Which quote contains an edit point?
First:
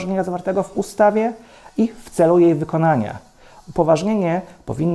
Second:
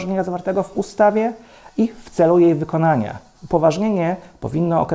second; 1 cut; at 3.3 s

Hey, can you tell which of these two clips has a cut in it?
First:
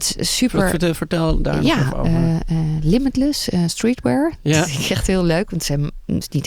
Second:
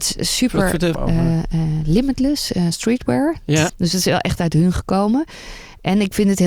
second; 2 cuts; at 0.9 s, 3.7 s

